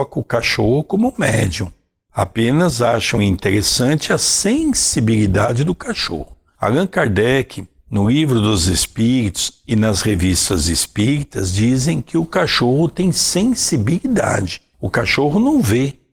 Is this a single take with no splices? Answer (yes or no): yes